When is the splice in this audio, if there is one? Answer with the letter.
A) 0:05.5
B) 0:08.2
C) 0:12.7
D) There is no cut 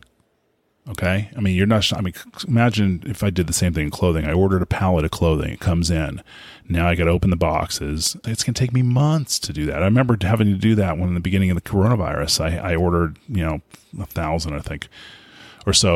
B